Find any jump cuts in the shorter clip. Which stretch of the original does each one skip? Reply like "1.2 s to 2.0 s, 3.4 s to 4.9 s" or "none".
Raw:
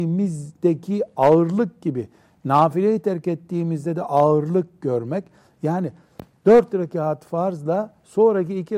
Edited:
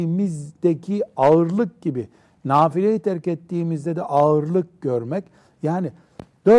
none